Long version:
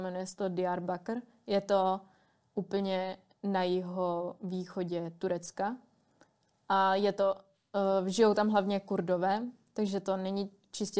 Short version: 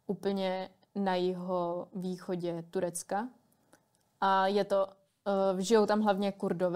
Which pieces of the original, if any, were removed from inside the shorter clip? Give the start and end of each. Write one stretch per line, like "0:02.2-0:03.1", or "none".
none

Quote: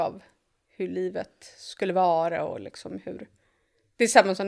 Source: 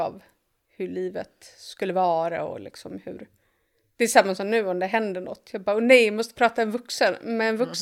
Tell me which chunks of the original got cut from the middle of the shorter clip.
none

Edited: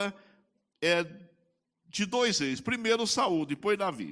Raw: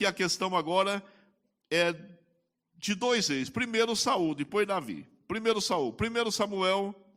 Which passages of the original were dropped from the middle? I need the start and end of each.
none

